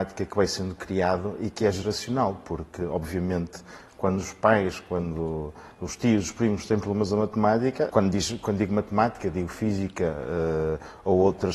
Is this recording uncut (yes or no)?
no